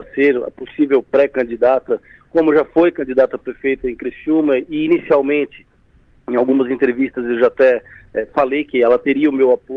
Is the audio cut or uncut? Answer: uncut